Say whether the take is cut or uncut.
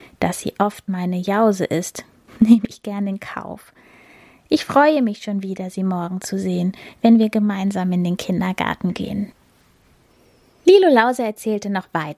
uncut